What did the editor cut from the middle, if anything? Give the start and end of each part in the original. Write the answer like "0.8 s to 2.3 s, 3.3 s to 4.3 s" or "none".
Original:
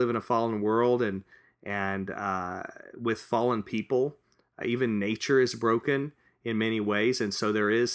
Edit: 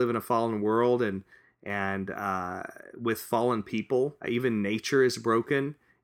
4.2 s to 4.5 s